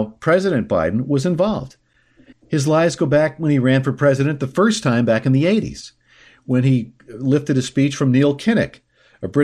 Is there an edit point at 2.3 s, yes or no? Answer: yes